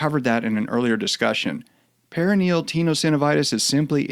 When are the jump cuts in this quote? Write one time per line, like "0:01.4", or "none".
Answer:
none